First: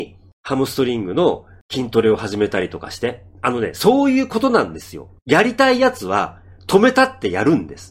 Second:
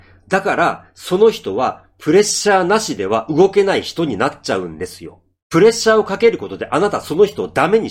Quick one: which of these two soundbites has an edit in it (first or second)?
first